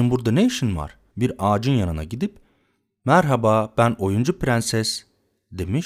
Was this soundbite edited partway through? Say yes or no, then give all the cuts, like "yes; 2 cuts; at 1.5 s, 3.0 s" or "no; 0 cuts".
yes; 1 cut; at 1.1 s